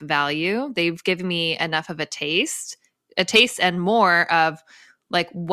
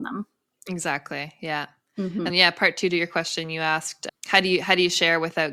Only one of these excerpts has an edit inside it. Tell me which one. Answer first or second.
second